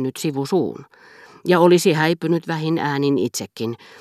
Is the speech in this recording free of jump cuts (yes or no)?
yes